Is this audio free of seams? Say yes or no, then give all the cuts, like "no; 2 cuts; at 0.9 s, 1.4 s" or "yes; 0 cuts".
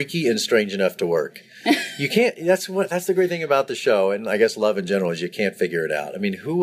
yes; 0 cuts